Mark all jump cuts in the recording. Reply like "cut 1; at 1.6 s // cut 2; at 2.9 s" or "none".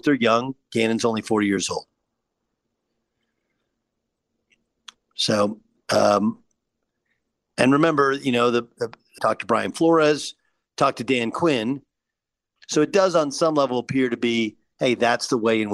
cut 1; at 9.2 s // cut 2; at 12.6 s